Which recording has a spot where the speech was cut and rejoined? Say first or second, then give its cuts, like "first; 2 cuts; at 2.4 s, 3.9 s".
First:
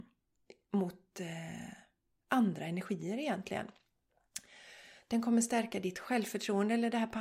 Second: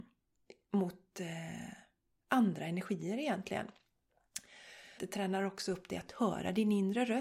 second; 1 cut; at 5.0 s